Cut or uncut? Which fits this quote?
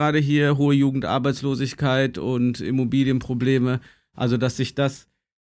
uncut